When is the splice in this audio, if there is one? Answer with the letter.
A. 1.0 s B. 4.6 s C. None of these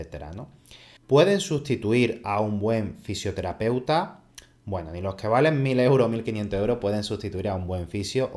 A